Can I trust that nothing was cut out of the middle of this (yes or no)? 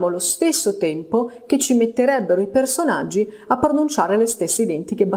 yes